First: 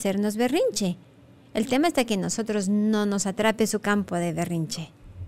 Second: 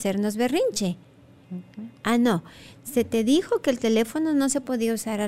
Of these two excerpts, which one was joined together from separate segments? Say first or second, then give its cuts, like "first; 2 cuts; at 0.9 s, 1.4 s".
second; 1 cut; at 1.4 s